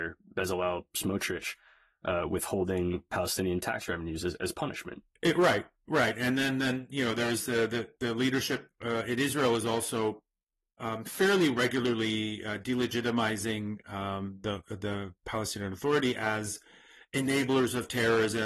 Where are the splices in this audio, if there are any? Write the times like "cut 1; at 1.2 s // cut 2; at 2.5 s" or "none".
none